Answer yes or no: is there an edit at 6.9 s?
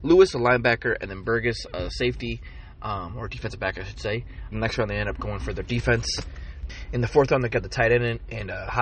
no